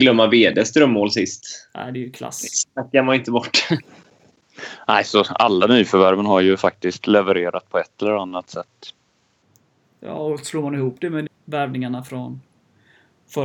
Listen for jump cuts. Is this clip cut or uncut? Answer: cut